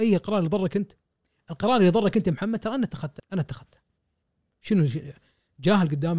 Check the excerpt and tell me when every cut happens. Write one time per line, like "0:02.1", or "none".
0:03.2